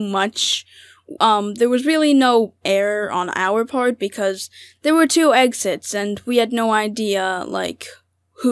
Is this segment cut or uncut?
uncut